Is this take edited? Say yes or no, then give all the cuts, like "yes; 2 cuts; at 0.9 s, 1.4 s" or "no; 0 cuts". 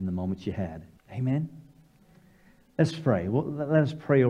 yes; 1 cut; at 1.0 s